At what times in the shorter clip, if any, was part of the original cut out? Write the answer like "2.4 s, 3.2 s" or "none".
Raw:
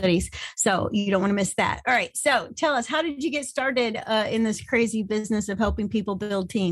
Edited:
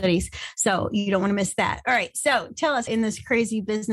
2.9 s